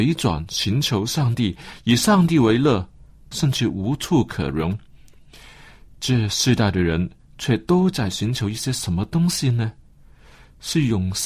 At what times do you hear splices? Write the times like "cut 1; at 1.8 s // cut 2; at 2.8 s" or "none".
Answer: cut 1; at 3.3 s